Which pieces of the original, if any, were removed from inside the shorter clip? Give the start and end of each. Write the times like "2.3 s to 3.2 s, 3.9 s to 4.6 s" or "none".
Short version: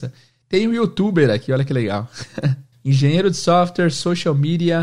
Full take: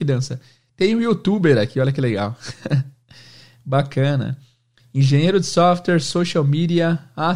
3.0 s to 4.8 s